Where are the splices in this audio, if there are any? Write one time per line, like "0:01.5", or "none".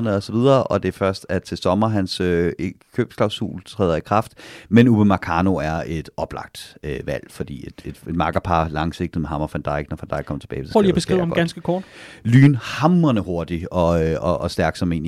none

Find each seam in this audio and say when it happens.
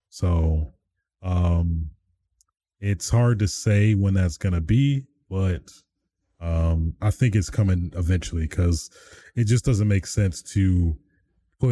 none

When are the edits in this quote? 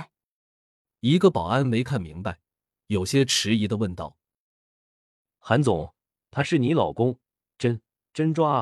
none

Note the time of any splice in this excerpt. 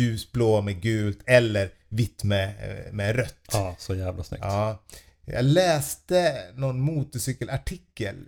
none

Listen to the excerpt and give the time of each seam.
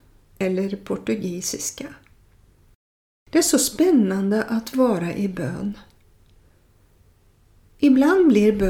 none

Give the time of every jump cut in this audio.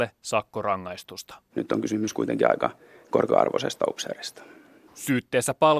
0:01.5

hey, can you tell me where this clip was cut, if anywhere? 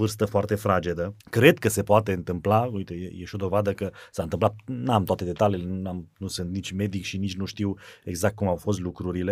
0:01.2

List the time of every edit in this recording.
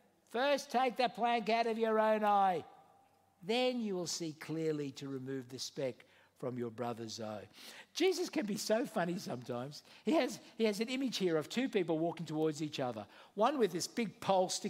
none

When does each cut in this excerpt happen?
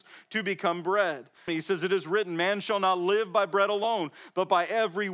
0:01.5

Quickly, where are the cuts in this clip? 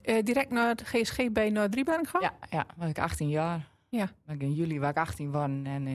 none

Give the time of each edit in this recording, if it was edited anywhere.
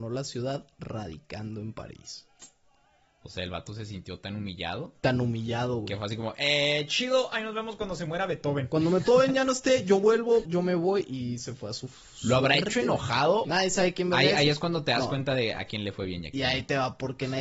0:10.4
0:13.4

